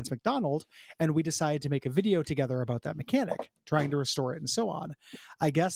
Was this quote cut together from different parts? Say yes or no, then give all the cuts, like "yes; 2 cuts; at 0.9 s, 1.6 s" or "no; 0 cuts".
no; 0 cuts